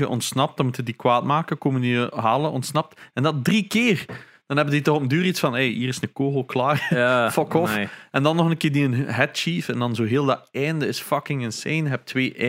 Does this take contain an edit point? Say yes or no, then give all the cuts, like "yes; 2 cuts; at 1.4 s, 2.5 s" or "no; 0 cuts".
no; 0 cuts